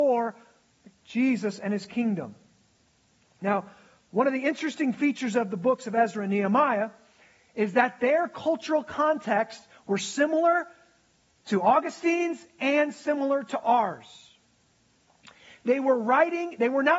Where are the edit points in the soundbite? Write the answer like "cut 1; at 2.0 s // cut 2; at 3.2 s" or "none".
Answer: none